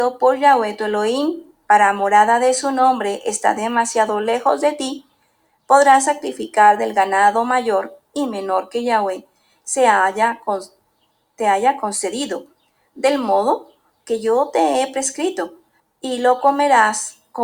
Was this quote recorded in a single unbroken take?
no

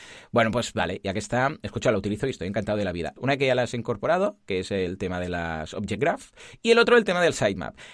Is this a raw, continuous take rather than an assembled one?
no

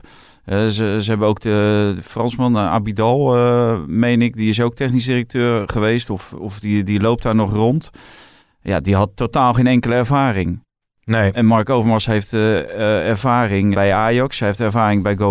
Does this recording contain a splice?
yes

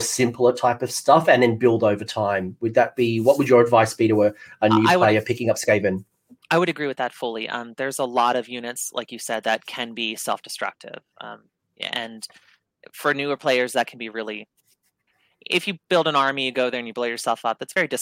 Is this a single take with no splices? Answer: yes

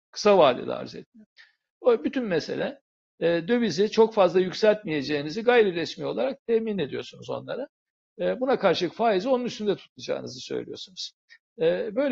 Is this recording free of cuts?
yes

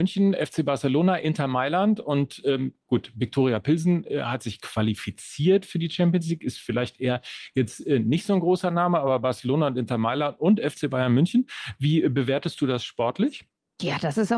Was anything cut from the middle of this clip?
no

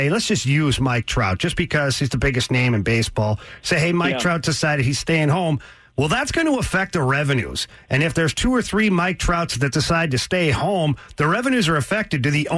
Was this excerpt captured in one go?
yes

